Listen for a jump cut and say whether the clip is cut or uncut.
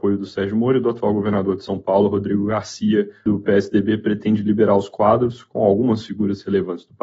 cut